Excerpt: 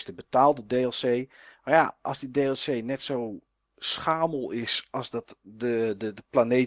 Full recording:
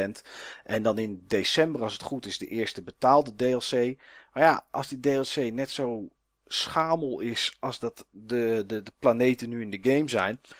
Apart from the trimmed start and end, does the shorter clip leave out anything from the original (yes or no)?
no